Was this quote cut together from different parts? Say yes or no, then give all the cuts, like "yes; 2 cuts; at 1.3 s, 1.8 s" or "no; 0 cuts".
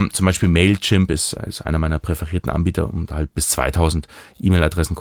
no; 0 cuts